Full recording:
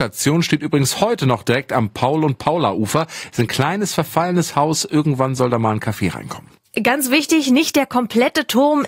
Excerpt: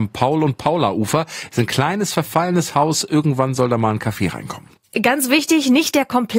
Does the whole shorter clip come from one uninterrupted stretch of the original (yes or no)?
yes